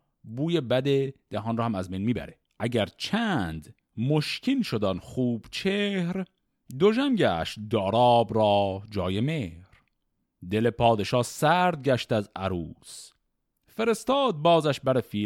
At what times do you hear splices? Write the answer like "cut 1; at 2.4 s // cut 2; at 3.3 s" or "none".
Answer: cut 1; at 2.5 s